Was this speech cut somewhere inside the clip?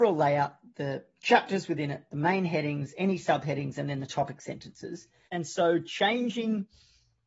yes; 1 cut; at 5.3 s

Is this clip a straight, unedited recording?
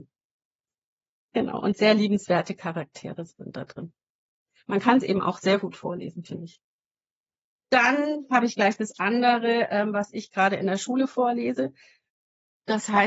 yes; 0 cuts

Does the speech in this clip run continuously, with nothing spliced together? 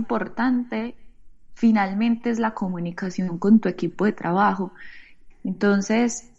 no; 1 cut; at 5.3 s

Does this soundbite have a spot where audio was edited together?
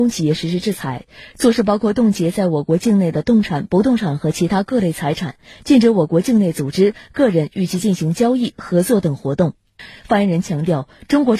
no; 0 cuts

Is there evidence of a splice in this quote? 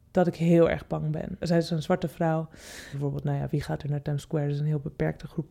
yes; 2 cuts; at 1.4 s, 2.9 s

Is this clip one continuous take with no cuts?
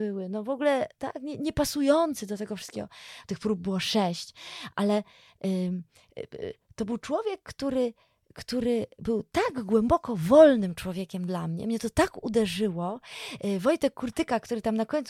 no; 1 cut; at 3.2 s

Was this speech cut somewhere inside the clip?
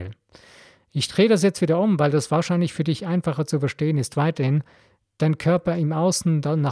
no; 0 cuts

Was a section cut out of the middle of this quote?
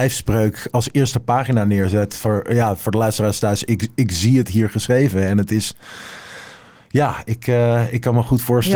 no; 0 cuts

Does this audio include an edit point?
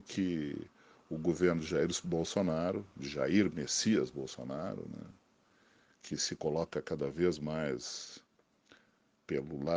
no; 0 cuts

